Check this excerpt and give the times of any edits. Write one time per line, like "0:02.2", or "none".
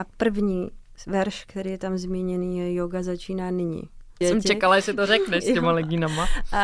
0:04.2